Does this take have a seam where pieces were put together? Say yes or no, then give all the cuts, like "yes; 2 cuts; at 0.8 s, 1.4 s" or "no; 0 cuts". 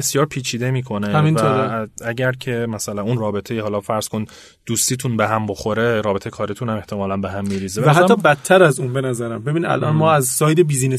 no; 0 cuts